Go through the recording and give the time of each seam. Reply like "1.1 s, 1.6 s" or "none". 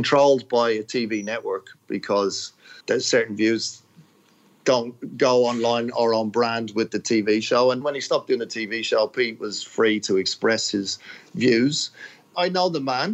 2.8 s, 7.8 s